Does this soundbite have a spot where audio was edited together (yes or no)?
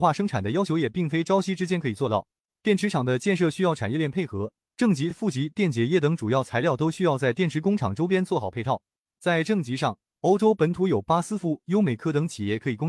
no